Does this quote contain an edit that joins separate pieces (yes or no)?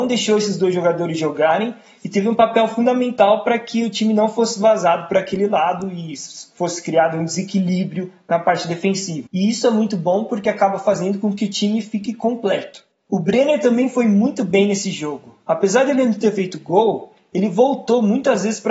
yes